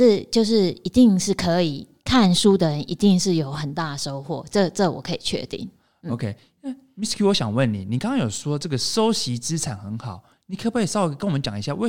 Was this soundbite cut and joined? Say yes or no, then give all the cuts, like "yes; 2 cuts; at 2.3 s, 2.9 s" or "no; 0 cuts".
no; 0 cuts